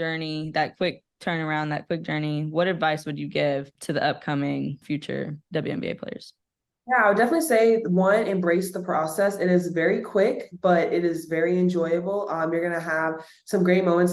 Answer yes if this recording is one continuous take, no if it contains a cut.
yes